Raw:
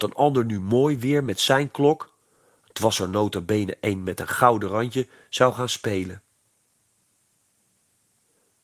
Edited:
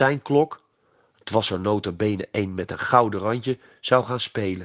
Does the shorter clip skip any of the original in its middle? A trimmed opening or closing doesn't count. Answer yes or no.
no